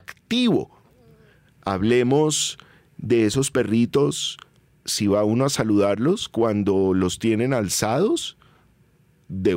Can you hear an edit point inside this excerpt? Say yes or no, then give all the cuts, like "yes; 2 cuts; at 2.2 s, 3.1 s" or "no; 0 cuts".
yes; 1 cut; at 1.5 s